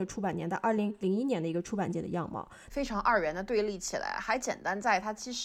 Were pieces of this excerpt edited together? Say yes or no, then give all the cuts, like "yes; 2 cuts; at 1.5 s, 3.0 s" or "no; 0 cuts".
yes; 1 cut; at 2.7 s